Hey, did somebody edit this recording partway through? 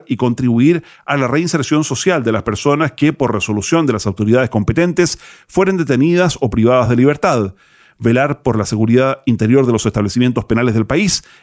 no; 0 cuts

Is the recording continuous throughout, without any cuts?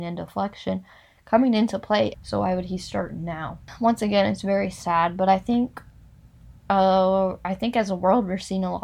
no; 1 cut; at 2.1 s

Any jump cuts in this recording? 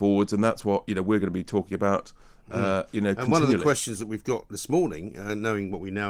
no; 0 cuts

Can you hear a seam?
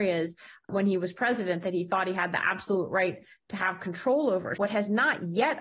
yes; 1 cut; at 4.6 s

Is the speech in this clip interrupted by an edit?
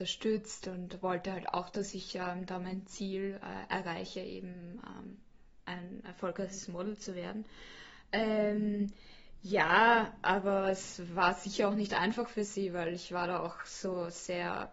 no; 0 cuts

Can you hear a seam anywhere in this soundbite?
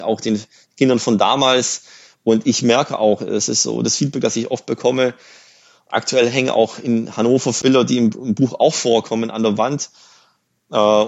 no; 0 cuts

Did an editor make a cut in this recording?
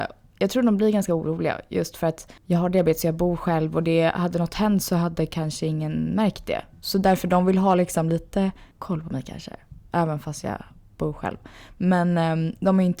no; 0 cuts

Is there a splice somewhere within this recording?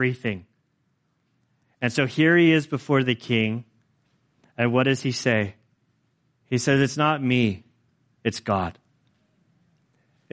no; 0 cuts

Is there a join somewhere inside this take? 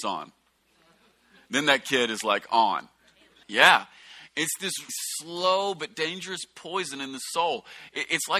yes; 2 cuts; at 3.4 s, 4.9 s

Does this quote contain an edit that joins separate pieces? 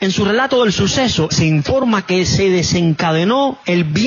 yes; 1 cut; at 1.3 s

